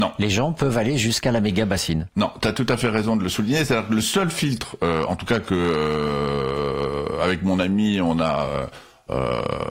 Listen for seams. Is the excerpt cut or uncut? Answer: uncut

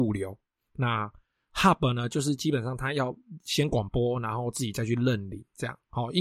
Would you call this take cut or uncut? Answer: uncut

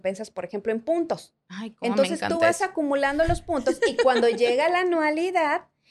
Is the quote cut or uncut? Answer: uncut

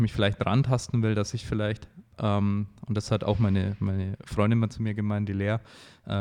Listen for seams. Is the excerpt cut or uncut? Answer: uncut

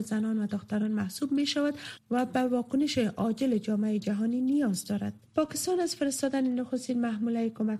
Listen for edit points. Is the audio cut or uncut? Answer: cut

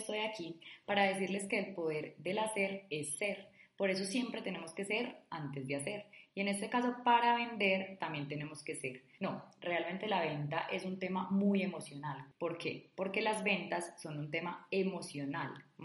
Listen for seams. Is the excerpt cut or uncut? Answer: cut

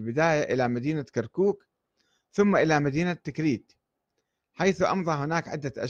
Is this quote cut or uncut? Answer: uncut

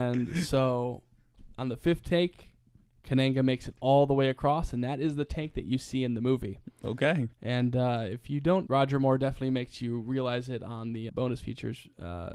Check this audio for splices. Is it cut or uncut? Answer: cut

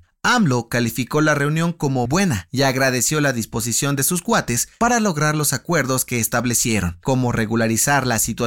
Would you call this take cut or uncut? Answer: cut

